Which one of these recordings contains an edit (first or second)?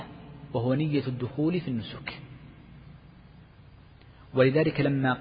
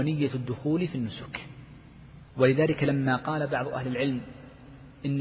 second